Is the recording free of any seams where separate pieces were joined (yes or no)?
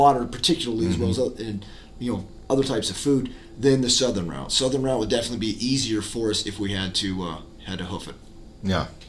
yes